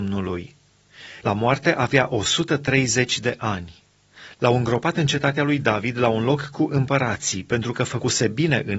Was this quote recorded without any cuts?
no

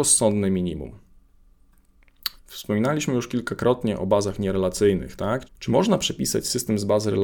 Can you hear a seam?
yes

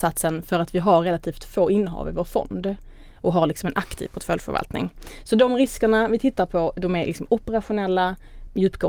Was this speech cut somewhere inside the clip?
no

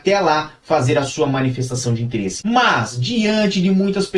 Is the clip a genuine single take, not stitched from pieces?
no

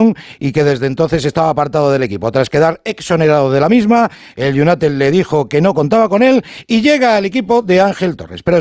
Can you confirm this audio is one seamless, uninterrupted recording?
yes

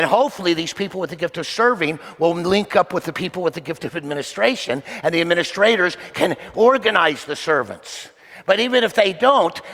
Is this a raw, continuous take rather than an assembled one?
yes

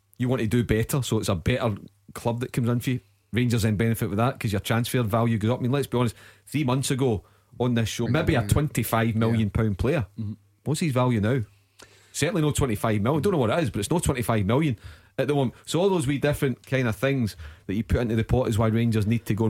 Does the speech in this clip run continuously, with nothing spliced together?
no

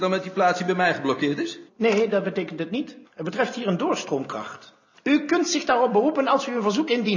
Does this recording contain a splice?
yes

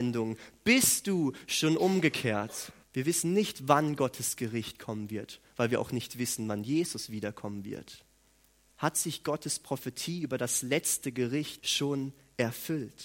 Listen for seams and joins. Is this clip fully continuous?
no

